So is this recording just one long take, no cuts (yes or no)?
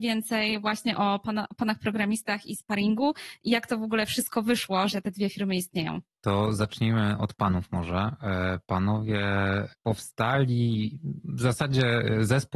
yes